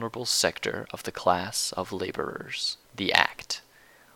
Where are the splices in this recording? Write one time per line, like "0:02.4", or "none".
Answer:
0:02.8